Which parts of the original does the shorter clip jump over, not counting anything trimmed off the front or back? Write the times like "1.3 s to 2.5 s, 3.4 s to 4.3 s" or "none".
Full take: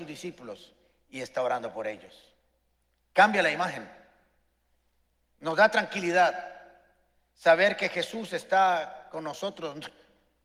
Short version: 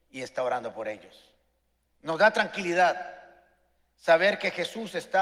2.8 s to 5.2 s